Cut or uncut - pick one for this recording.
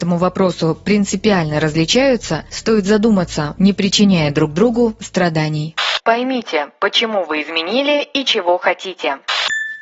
cut